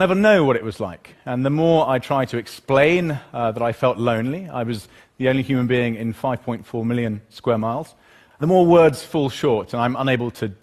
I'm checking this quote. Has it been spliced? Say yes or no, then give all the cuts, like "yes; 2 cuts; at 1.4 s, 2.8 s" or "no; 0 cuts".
yes; 1 cut; at 8.3 s